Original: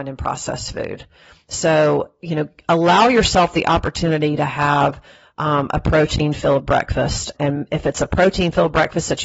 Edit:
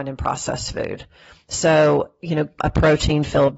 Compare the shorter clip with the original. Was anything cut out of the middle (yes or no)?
yes